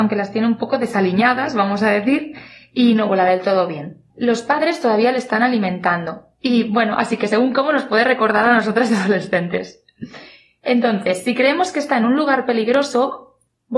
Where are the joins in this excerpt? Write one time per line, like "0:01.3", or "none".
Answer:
0:04.1